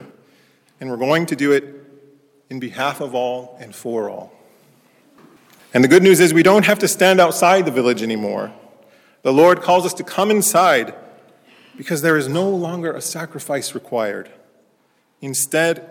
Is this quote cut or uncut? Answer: uncut